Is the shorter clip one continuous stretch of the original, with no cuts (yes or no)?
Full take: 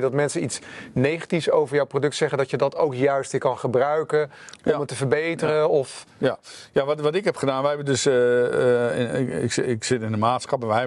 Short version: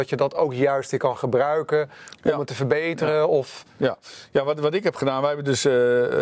yes